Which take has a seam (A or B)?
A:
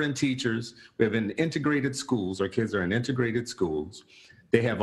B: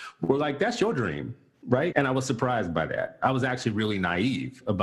B